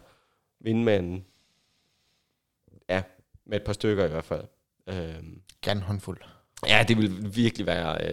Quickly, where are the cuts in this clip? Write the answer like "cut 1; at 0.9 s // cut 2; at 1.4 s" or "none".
none